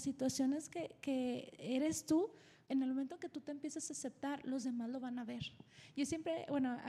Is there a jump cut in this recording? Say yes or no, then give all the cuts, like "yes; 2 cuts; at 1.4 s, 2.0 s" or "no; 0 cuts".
no; 0 cuts